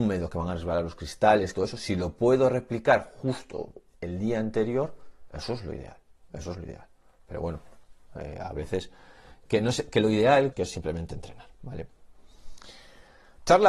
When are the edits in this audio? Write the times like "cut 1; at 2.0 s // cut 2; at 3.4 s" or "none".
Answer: cut 1; at 1.5 s // cut 2; at 9.5 s // cut 3; at 10.5 s